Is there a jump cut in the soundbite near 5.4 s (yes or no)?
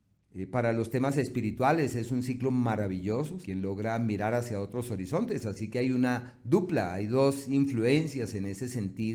no